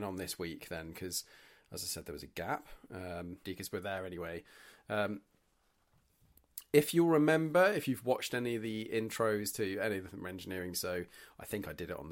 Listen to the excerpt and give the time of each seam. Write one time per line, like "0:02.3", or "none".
0:03.4
0:10.7